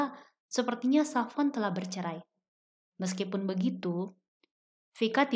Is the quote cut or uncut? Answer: uncut